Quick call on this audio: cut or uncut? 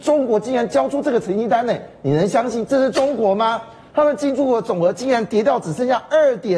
uncut